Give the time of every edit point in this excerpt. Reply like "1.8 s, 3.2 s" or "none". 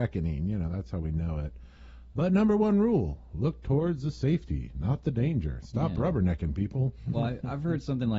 2.1 s, 7.1 s

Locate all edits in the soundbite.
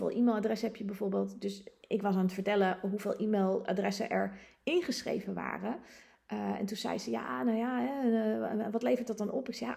none

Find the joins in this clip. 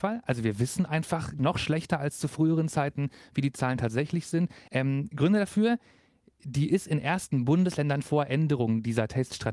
4.7 s, 8.0 s

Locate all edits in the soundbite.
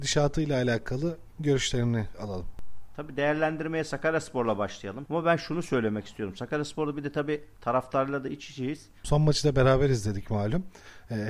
5.1 s, 9.0 s

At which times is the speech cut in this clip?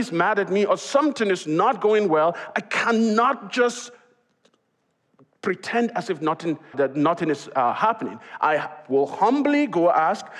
6.7 s

